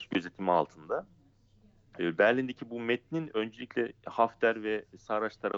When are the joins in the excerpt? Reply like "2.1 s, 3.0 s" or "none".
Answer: 2.0 s